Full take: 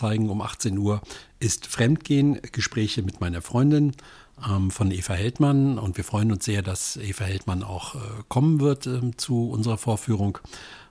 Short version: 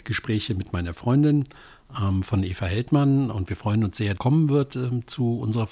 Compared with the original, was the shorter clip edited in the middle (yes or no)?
yes